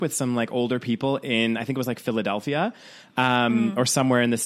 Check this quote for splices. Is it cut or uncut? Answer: uncut